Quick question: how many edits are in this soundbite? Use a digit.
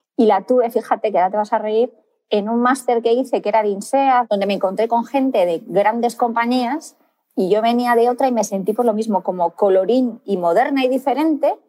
0